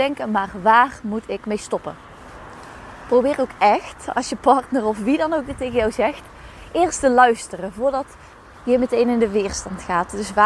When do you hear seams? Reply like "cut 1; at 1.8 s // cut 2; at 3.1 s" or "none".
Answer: none